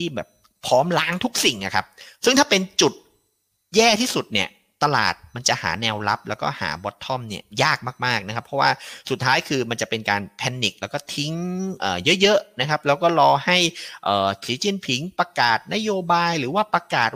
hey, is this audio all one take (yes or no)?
yes